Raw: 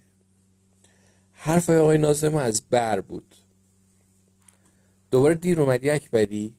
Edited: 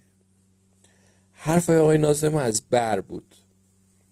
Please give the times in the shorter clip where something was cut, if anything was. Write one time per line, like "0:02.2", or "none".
none